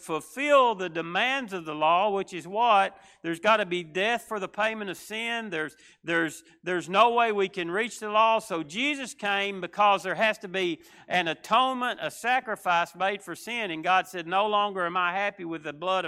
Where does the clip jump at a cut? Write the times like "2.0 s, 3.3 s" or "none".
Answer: none